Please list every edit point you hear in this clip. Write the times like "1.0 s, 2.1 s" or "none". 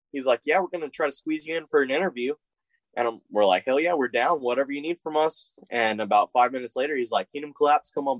none